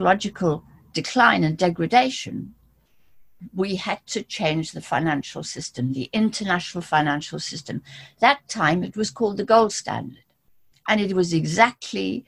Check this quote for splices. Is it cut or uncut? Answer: uncut